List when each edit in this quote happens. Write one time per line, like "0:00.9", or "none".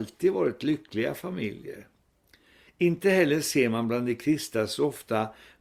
0:02.7